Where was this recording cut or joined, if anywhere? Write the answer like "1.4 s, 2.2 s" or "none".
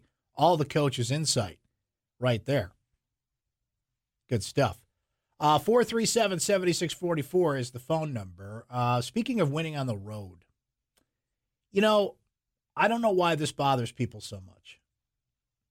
none